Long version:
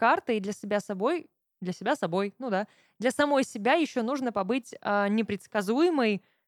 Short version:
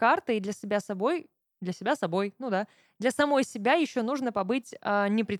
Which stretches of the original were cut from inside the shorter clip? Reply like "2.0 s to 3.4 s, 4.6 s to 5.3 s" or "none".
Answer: none